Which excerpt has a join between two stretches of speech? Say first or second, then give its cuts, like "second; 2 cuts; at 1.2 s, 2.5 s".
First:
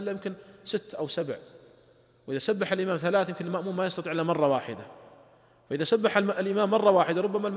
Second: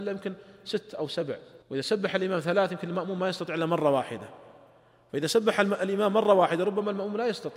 second; 1 cut; at 1.6 s